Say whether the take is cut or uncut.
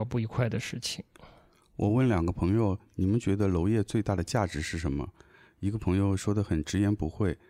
uncut